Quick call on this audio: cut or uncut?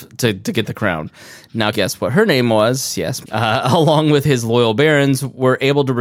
cut